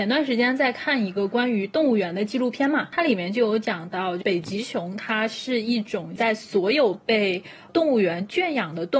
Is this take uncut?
yes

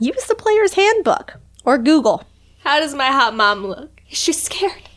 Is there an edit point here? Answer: yes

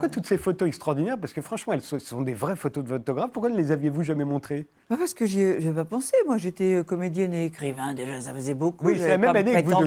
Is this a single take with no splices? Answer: yes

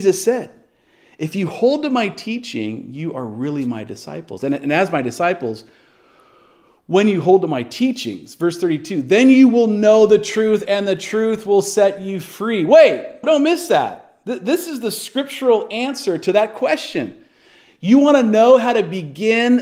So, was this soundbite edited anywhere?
yes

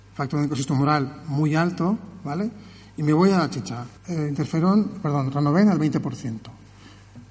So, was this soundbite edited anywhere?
yes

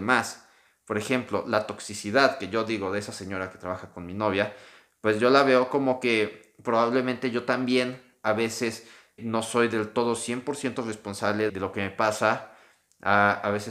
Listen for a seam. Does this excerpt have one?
yes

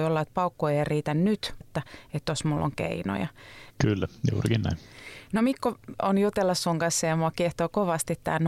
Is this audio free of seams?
no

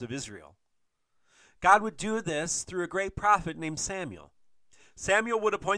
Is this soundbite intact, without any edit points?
yes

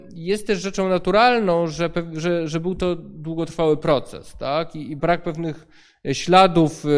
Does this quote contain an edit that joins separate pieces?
yes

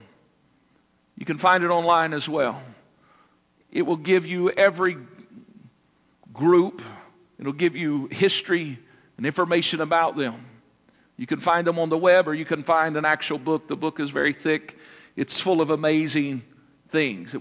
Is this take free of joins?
yes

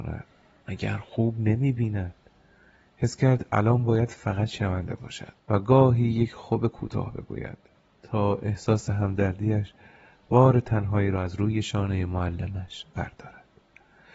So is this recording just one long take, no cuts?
no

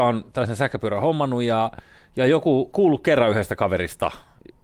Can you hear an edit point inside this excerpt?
yes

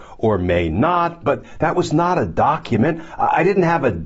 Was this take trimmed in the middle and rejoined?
yes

